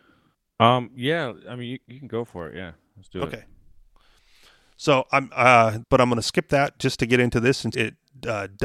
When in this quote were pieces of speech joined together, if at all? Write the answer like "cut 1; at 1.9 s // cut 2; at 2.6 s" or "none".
cut 1; at 5.8 s // cut 2; at 7.7 s